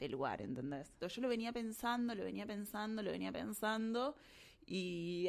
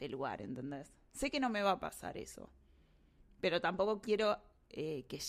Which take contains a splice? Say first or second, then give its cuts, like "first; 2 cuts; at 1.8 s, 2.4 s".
first; 1 cut; at 1.0 s